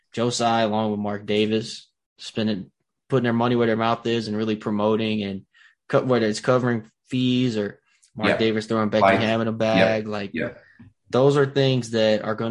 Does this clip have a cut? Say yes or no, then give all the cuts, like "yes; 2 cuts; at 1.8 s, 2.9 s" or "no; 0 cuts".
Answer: no; 0 cuts